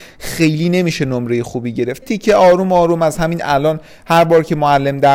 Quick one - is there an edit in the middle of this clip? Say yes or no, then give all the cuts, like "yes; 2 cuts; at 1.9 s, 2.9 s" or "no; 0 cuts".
yes; 1 cut; at 2.0 s